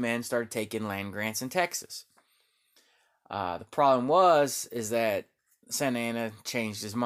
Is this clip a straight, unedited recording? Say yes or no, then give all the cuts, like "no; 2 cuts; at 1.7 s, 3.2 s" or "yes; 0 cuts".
yes; 0 cuts